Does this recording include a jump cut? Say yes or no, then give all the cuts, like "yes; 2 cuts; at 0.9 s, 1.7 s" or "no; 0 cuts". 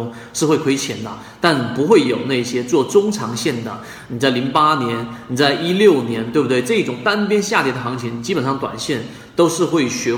no; 0 cuts